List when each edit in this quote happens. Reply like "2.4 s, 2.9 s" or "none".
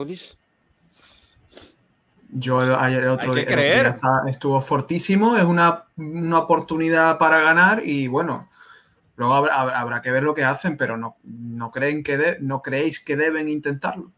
none